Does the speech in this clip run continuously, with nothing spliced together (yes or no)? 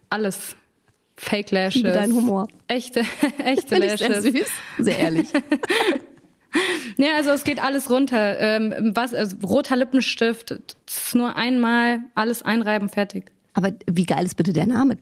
yes